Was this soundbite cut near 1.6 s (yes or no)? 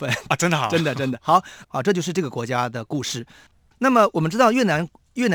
yes